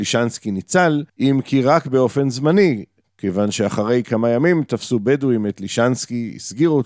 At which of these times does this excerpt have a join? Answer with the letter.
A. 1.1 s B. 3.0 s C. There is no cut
A